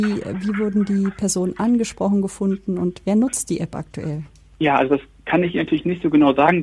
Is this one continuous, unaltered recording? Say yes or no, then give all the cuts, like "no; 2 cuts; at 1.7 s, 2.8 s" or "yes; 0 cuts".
yes; 0 cuts